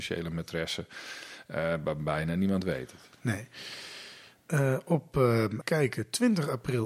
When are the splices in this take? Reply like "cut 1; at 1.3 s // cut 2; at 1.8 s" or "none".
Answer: cut 1; at 5.6 s